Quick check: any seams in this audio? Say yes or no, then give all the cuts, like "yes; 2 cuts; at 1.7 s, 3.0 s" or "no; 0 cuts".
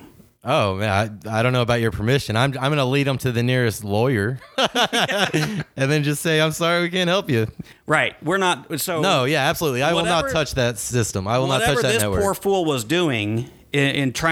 no; 0 cuts